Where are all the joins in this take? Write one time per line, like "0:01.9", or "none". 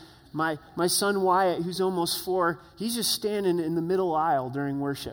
none